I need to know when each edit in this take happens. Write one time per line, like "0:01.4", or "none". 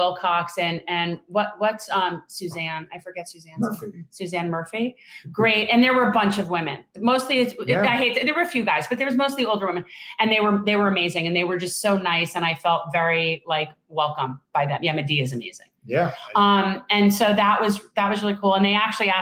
none